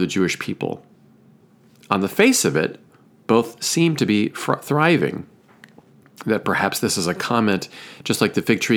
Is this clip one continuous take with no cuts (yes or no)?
yes